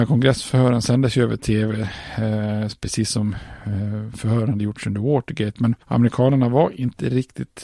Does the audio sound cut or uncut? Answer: uncut